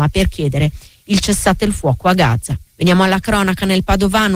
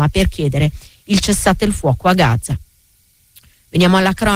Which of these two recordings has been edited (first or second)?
first